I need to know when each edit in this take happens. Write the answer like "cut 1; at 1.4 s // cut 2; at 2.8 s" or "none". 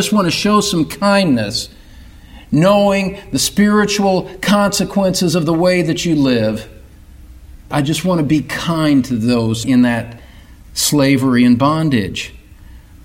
cut 1; at 7.6 s